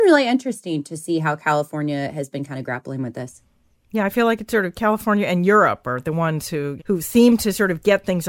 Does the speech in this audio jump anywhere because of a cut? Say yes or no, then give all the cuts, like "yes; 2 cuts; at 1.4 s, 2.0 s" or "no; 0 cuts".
yes; 1 cut; at 6.8 s